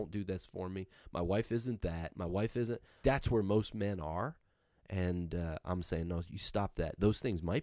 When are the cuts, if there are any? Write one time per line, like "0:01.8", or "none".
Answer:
0:03.0